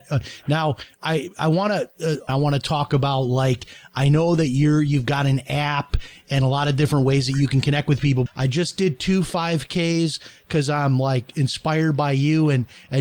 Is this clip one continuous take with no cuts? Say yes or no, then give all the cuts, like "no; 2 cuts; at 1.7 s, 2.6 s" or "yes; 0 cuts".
no; 2 cuts; at 2.3 s, 8.3 s